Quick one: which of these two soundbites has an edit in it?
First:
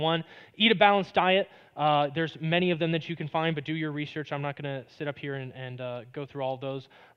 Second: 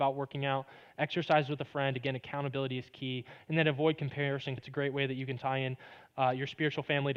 second; 1 cut; at 4.6 s

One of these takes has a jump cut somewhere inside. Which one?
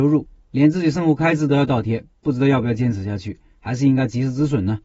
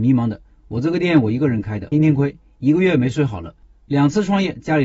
second; 1 cut; at 1.9 s

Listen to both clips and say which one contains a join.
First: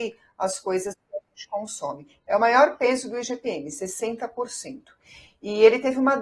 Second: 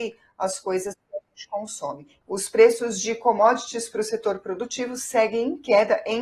second; 1 cut; at 2.2 s

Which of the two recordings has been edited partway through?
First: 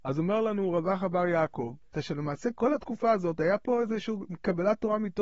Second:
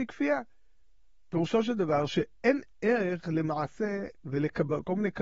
first; 1 cut; at 1.9 s

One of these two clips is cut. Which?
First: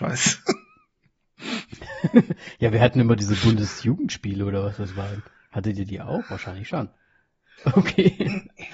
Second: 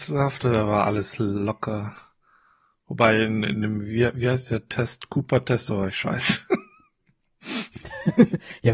first; 1 cut; at 7.6 s

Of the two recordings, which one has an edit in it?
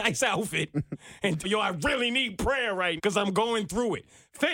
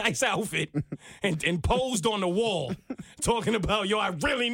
first; 2 cuts; at 1.4 s, 3.0 s

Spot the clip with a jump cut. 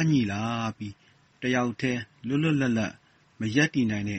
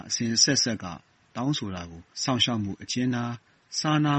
second; 1 cut; at 2.1 s

